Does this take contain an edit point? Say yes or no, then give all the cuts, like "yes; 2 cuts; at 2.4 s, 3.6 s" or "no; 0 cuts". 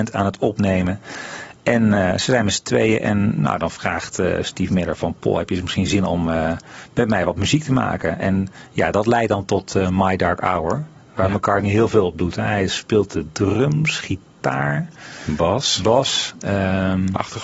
no; 0 cuts